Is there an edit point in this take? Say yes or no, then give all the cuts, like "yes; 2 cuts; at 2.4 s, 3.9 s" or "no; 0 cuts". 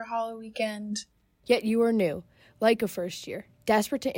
yes; 1 cut; at 1.4 s